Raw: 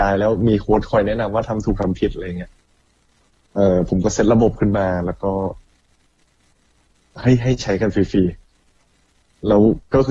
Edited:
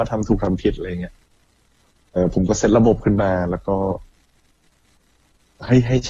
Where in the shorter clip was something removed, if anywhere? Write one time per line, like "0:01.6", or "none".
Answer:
0:02.2